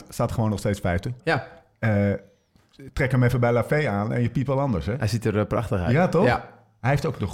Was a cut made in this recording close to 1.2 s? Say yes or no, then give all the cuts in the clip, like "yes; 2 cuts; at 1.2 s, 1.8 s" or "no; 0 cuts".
yes; 1 cut; at 1.2 s